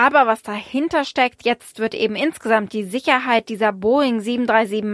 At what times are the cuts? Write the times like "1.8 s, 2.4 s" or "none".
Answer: 1.4 s